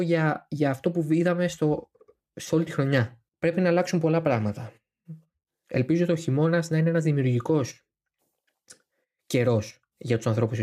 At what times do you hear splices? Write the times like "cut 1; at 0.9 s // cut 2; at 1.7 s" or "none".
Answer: cut 1; at 3.3 s